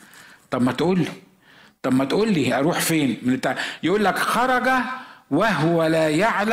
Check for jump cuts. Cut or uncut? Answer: uncut